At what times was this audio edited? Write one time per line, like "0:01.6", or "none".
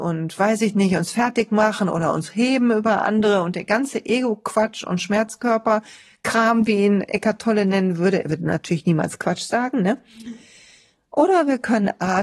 none